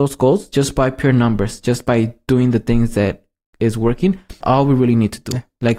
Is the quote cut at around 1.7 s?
no; 1 cut; at 4.4 s

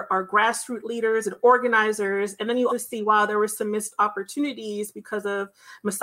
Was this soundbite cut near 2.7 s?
yes; 1 cut; at 2.7 s

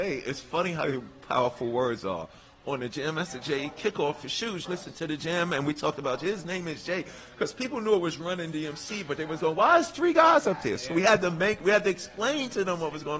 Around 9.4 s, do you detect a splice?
yes; 2 cuts; at 4.6 s, 9.4 s

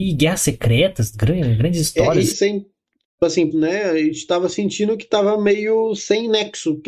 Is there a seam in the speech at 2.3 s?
yes; 2 cuts; at 2.3 s, 3.5 s

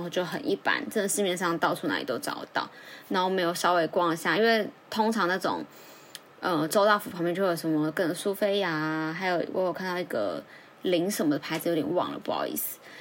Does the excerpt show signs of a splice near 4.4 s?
no; 0 cuts

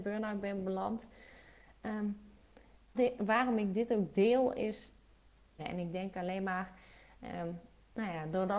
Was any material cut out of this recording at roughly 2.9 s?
yes; 2 cuts; at 2.9 s, 5.6 s

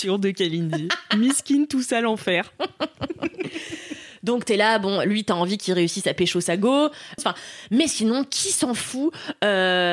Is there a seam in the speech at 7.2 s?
yes; 1 cut; at 7.2 s

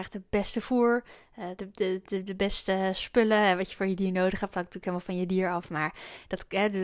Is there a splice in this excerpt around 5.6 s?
no; 1 cut; at 1.6 s

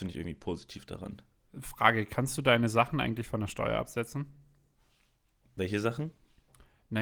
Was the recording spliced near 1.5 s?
yes; 1 cut; at 1.5 s

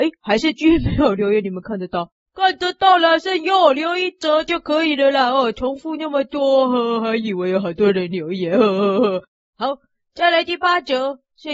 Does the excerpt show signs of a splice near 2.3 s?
no; 0 cuts

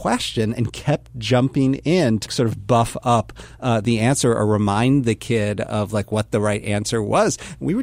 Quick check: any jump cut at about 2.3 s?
yes; 1 cut; at 2.3 s

